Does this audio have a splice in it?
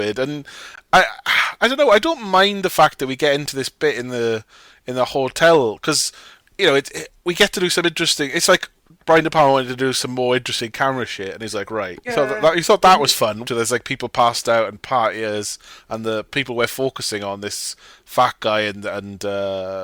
yes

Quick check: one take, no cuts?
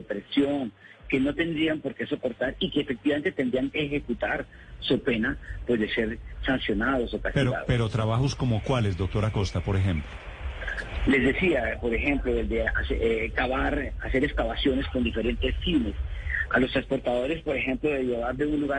yes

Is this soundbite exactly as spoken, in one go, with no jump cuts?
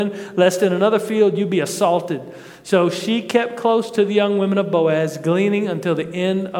yes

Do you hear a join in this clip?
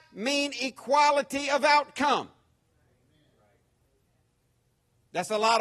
no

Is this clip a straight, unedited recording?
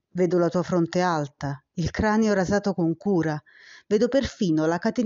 yes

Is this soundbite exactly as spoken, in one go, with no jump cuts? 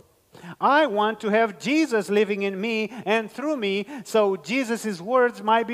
yes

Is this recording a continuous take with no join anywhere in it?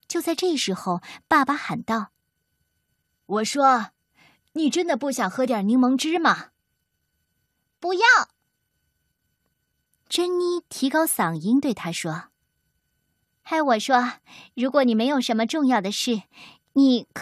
yes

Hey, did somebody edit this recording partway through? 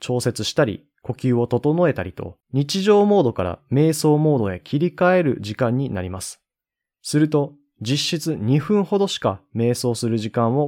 yes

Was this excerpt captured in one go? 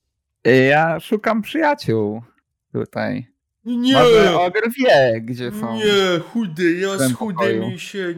yes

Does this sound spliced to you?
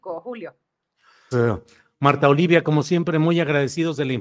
yes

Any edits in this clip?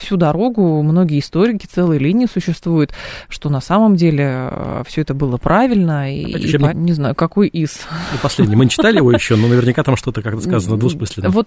yes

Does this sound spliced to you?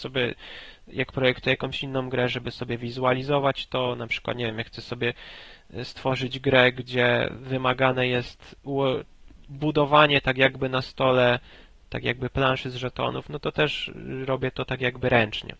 no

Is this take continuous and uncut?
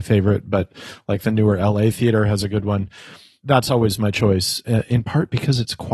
yes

